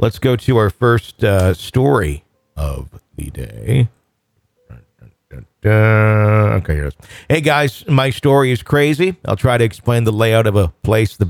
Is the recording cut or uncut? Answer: uncut